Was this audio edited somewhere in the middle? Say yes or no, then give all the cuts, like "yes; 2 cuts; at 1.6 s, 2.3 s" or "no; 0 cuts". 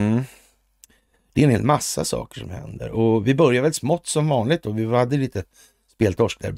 no; 0 cuts